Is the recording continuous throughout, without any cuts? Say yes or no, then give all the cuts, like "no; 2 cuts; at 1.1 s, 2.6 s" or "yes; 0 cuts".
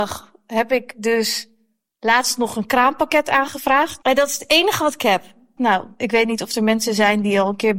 no; 2 cuts; at 4.0 s, 5.6 s